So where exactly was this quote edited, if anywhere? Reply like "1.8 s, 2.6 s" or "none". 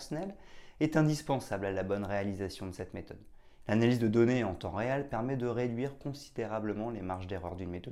3.6 s